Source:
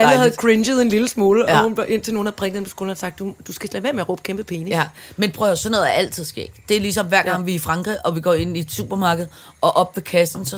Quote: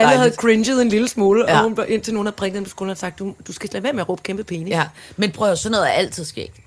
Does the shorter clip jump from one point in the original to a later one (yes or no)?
no